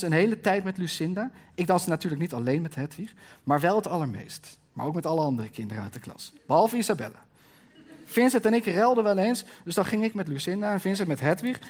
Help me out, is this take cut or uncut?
uncut